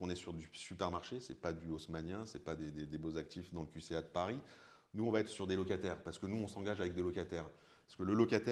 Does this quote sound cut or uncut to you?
uncut